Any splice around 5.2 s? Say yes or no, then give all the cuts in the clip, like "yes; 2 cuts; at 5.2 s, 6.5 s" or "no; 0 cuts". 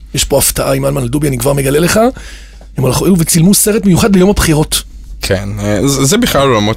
yes; 1 cut; at 5.2 s